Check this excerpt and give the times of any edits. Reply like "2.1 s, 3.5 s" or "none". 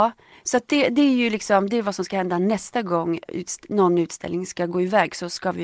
3.3 s